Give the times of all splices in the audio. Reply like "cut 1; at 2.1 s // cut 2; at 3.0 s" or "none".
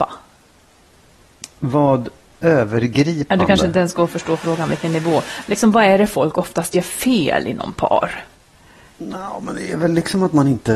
none